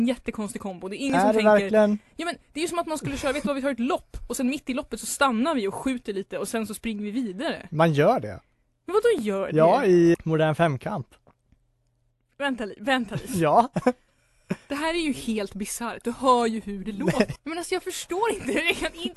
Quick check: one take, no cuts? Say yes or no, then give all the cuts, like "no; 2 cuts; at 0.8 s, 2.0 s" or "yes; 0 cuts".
no; 2 cuts; at 10.1 s, 17.4 s